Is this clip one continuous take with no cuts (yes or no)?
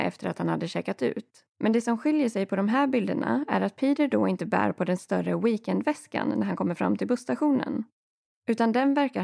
no